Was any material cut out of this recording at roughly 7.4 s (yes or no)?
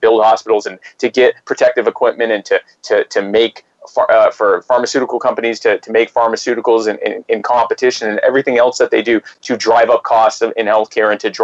no